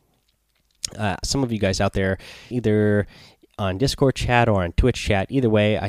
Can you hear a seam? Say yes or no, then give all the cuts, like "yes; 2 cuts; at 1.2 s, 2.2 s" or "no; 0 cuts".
yes; 2 cuts; at 1.2 s, 2.5 s